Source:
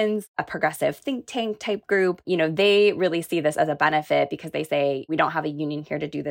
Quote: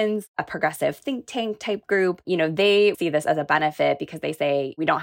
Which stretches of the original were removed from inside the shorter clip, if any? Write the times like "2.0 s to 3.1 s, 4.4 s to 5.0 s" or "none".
2.9 s to 3.3 s